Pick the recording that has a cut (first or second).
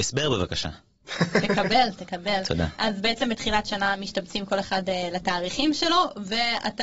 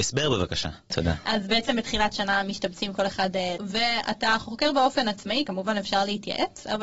second